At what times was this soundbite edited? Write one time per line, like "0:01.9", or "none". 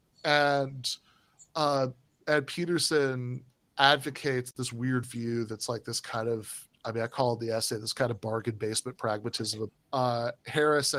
0:09.7